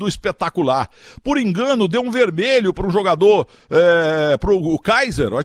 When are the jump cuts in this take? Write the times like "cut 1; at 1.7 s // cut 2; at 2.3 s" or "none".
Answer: none